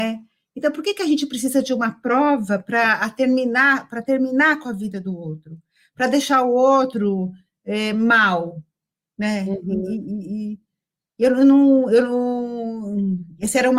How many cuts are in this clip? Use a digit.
0